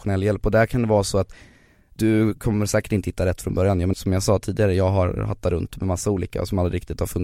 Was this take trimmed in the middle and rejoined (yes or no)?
yes